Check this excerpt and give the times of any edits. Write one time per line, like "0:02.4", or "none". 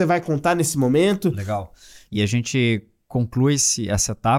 0:02.1